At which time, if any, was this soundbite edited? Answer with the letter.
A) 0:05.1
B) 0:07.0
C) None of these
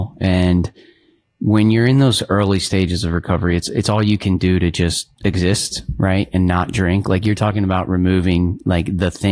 A